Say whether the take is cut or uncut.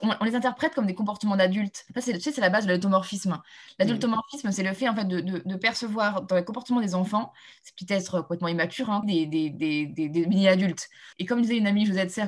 cut